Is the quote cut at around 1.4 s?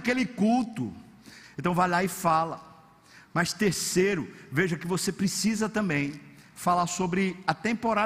yes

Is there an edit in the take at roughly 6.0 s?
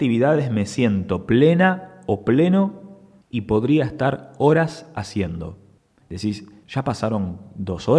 yes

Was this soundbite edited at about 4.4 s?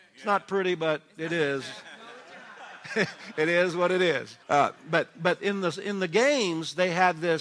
yes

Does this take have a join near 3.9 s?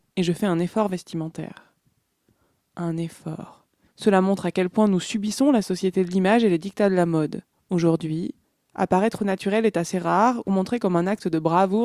yes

